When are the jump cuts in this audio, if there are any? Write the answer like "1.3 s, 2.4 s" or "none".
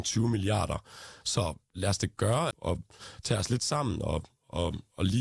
1.2 s, 2.5 s